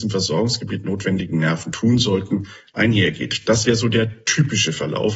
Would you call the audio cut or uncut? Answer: uncut